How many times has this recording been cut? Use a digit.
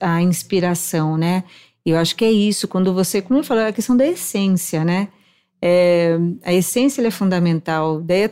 0